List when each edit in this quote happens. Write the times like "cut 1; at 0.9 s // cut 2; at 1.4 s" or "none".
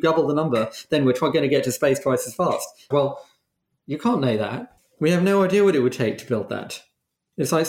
cut 1; at 2.9 s